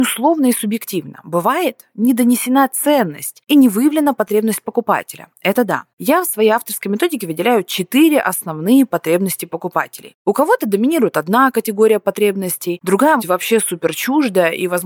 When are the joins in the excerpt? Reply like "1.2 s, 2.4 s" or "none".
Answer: 13.2 s